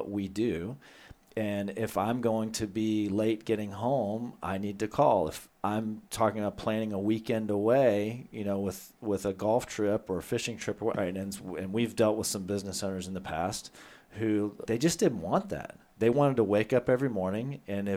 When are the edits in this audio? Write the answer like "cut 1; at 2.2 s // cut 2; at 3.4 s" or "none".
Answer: cut 1; at 5.5 s // cut 2; at 10.9 s // cut 3; at 14.7 s